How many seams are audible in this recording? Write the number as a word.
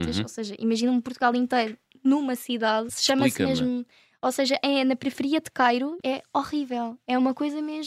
two